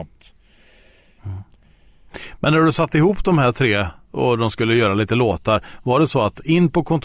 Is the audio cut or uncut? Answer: cut